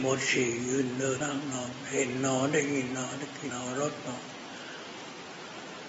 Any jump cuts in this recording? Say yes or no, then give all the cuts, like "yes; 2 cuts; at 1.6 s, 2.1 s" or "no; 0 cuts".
yes; 2 cuts; at 1.2 s, 3.5 s